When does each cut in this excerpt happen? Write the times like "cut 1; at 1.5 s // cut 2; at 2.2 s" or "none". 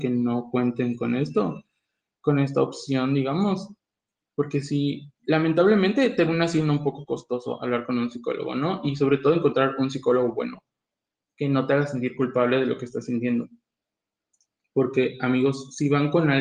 cut 1; at 5.2 s